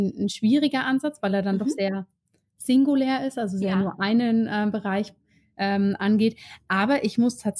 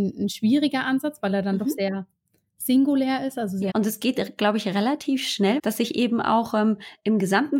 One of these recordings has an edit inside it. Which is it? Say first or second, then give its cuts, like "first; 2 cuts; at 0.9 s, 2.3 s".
second; 2 cuts; at 3.7 s, 5.6 s